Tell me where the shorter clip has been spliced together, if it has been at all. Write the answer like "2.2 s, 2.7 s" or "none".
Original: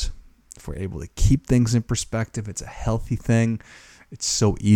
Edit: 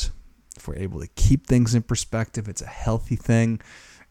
none